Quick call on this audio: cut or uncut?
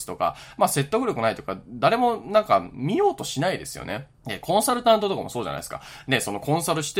cut